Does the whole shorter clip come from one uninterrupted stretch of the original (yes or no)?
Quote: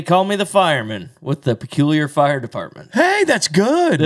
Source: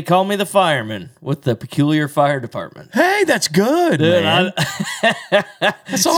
yes